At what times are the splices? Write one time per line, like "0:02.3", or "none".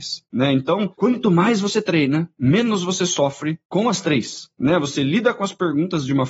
none